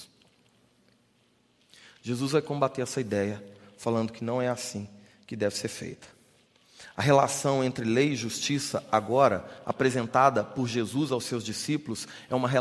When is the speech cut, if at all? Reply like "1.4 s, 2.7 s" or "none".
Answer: none